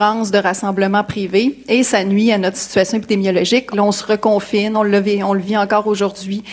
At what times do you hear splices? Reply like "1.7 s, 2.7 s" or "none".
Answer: 3.7 s, 4.7 s